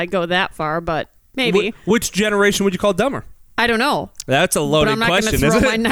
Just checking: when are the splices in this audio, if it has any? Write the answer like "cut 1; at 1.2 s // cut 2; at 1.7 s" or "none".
none